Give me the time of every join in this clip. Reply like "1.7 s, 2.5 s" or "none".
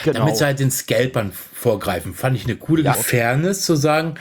2.9 s